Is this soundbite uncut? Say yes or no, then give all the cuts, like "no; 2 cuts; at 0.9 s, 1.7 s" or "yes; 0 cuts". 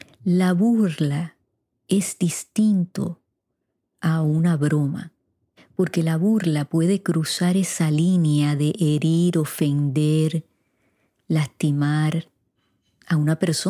yes; 0 cuts